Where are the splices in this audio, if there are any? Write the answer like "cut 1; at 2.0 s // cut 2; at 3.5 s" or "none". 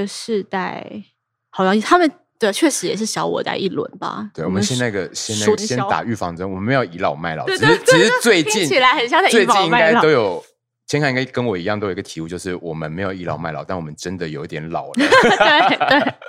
cut 1; at 5.6 s